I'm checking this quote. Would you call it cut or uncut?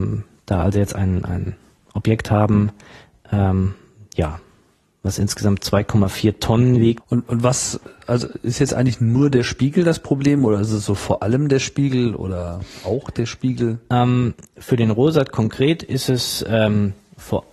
cut